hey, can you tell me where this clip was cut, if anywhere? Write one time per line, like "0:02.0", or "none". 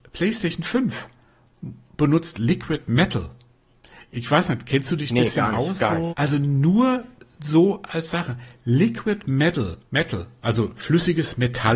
0:06.1
0:09.9